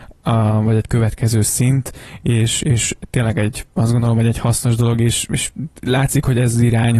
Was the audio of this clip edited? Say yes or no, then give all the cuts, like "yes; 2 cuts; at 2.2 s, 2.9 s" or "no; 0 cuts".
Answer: no; 0 cuts